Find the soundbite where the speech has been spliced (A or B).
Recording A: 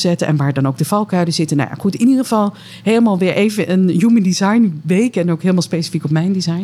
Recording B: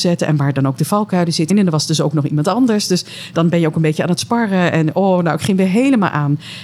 B